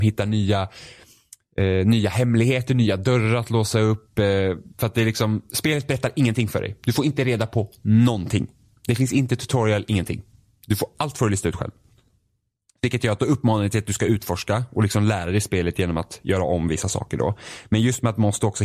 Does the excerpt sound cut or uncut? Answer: uncut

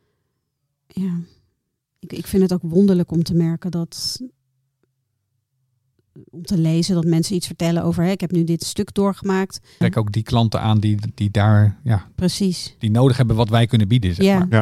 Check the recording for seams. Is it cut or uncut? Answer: cut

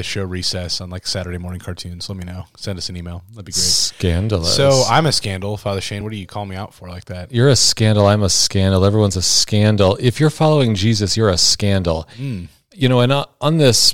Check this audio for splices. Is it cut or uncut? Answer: uncut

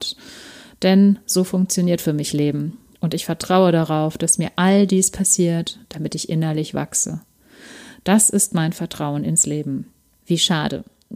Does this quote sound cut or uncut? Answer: cut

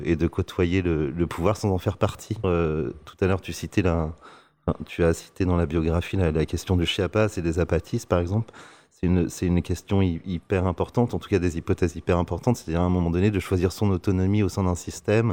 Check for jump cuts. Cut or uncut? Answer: cut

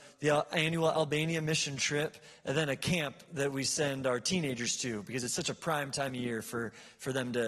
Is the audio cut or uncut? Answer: uncut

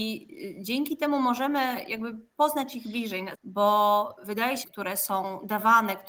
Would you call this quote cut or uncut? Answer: cut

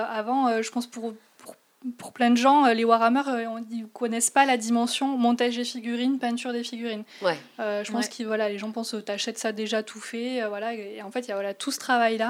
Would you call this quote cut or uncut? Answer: uncut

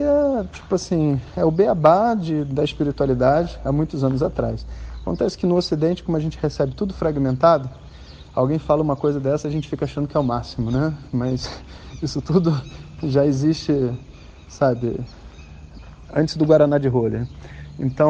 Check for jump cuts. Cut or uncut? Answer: uncut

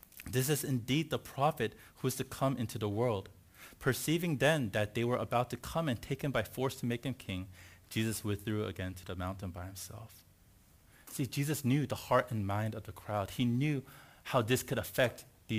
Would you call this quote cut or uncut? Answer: uncut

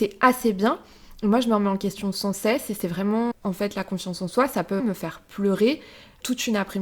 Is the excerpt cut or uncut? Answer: cut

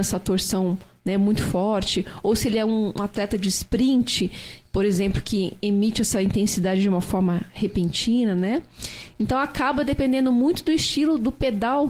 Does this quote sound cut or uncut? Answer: uncut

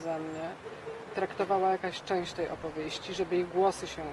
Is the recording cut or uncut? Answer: uncut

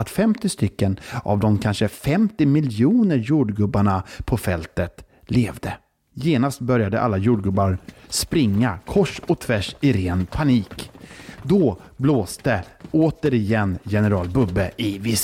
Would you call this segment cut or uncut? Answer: uncut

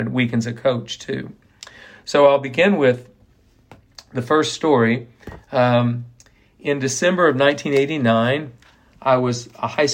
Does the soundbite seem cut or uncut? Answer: uncut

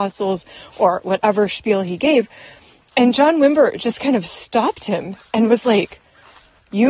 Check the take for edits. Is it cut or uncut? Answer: uncut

